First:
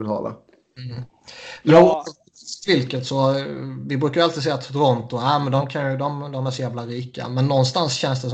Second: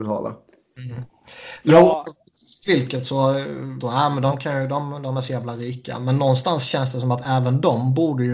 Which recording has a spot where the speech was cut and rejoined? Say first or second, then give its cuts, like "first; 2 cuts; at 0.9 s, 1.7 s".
second; 1 cut; at 3.8 s